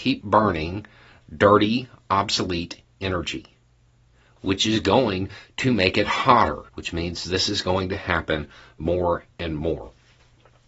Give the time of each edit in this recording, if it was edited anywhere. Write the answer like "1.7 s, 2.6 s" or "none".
4.4 s, 6.7 s